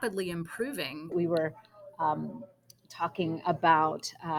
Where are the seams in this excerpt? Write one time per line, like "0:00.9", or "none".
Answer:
0:01.1